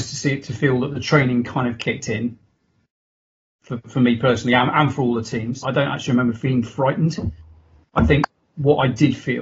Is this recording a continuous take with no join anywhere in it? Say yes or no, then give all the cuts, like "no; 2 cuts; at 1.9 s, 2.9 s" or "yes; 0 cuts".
no; 1 cut; at 5.6 s